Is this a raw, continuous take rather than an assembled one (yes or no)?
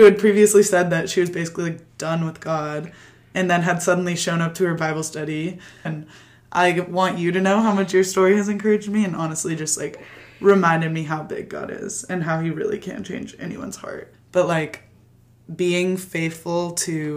no